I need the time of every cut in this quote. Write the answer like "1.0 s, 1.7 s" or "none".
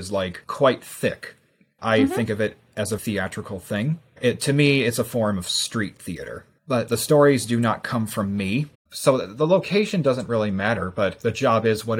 1.8 s, 3.0 s, 8.7 s

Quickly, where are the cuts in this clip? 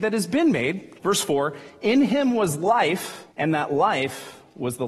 0.9 s, 3.3 s

